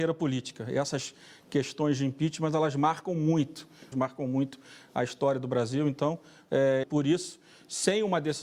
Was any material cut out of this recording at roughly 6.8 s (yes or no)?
yes